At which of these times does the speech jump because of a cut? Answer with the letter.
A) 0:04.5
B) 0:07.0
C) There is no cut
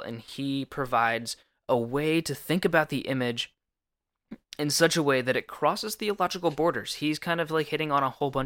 C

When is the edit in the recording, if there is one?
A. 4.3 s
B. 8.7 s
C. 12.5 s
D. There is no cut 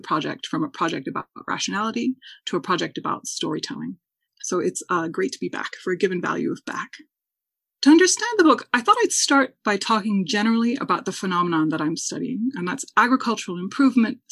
A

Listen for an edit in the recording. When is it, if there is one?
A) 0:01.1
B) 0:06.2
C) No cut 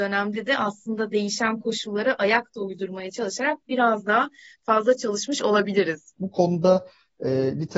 B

